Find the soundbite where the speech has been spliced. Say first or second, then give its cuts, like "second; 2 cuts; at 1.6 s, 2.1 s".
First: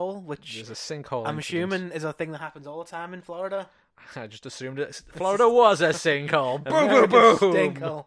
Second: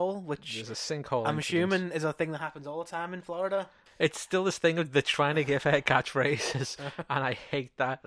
second; 1 cut; at 3.9 s